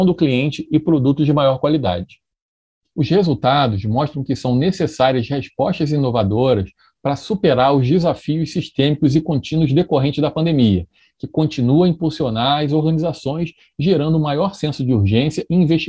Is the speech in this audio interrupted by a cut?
yes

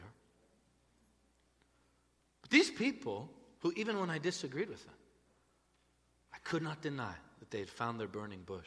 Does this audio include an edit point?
no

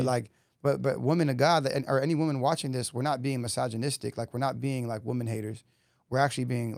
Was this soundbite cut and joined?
no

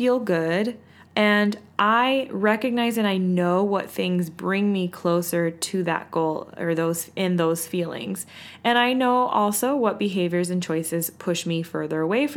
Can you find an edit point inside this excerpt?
yes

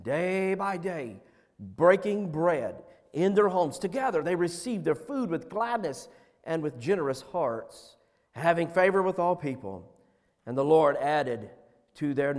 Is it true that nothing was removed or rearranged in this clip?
no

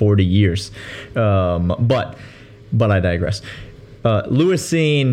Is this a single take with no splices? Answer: yes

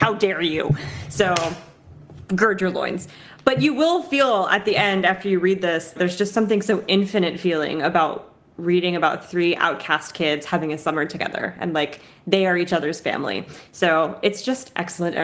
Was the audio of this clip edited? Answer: yes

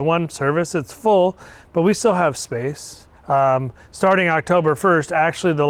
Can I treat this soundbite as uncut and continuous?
no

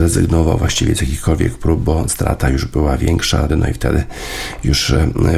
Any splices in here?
yes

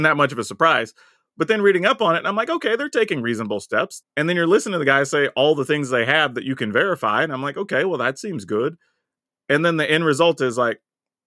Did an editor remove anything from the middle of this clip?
yes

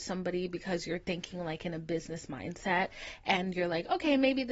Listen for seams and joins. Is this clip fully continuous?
yes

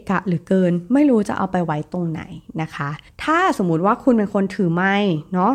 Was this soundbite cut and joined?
no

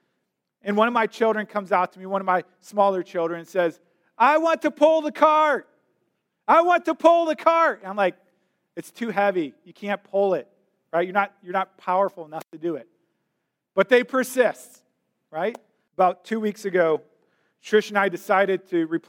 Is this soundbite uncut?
no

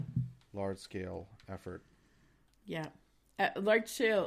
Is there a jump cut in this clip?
no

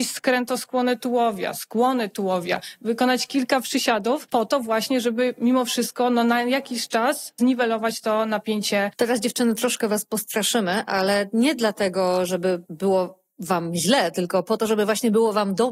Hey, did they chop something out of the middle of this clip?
no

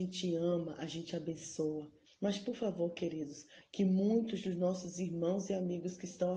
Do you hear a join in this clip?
yes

